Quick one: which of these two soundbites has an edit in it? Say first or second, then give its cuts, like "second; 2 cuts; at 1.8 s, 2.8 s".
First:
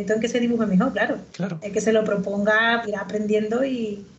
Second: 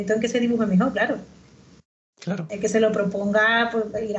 first; 2 cuts; at 1.3 s, 2.8 s